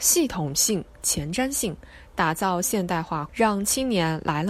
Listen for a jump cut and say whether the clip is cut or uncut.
cut